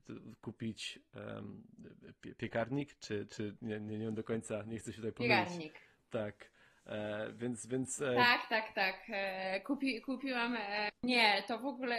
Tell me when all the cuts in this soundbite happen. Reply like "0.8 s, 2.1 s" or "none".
none